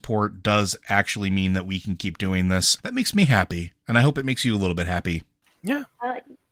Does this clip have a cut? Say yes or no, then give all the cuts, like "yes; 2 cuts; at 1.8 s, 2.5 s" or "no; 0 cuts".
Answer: yes; 1 cut; at 2.8 s